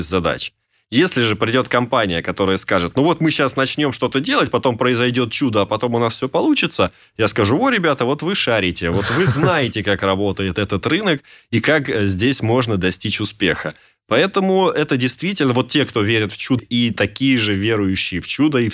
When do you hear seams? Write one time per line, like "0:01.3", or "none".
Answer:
0:16.6